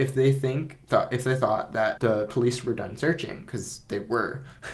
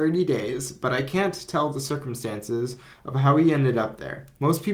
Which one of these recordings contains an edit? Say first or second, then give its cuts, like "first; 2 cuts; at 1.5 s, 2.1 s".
first; 1 cut; at 2.0 s